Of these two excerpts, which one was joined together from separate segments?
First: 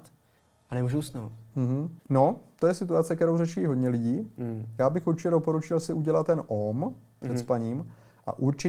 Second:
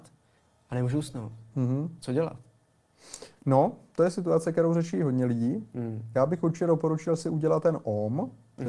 first; 1 cut; at 2.0 s

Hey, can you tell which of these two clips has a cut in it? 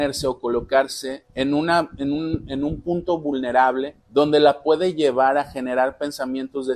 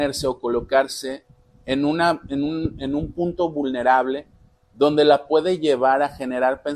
first; 2 cuts; at 1.3 s, 4.0 s

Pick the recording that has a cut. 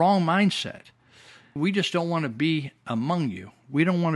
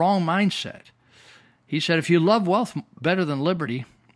first; 1 cut; at 1.6 s

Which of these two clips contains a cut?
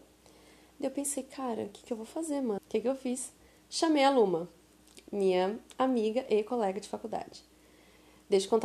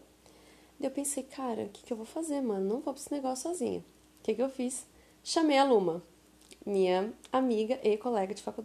first; 1 cut; at 2.6 s

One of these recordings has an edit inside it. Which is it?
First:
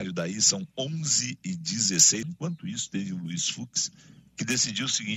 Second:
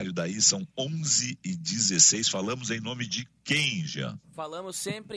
first; 1 cut; at 2.2 s

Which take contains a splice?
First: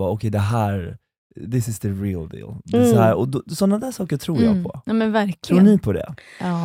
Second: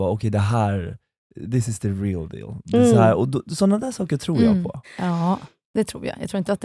second; 1 cut; at 4.8 s

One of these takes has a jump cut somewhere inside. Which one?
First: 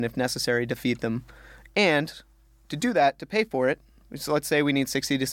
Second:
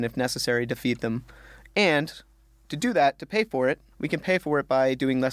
second; 1 cut; at 3.9 s

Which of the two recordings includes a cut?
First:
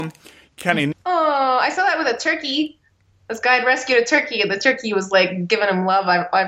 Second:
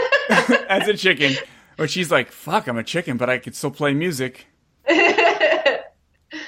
first; 1 cut; at 0.9 s

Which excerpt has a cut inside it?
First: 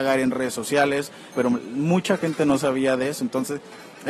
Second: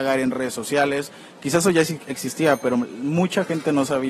first; 1 cut; at 1.3 s

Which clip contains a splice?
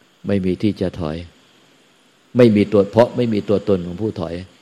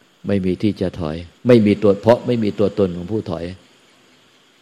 second; 1 cut; at 1.4 s

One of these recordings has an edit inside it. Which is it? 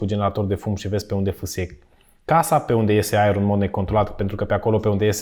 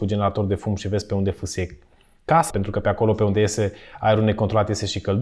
second; 1 cut; at 2.5 s

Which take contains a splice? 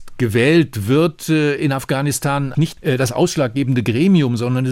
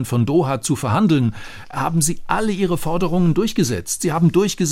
first; 1 cut; at 2.5 s

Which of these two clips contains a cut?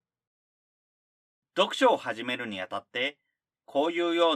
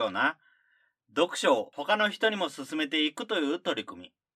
first; 1 cut; at 1.4 s

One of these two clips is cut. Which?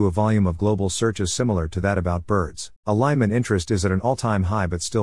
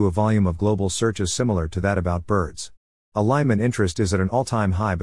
first; 1 cut; at 2.8 s

